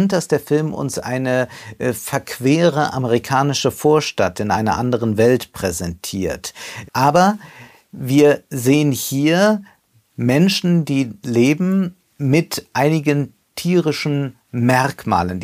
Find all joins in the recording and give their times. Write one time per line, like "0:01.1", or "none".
0:06.8
0:12.0